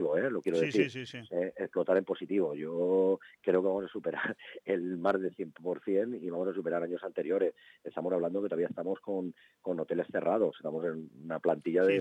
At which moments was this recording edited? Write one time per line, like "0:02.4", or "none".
none